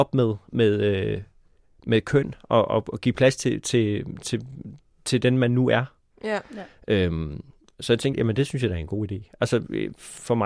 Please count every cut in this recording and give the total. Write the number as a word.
two